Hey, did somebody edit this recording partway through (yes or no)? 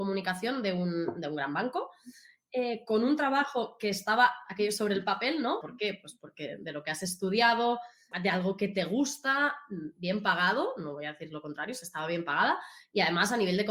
yes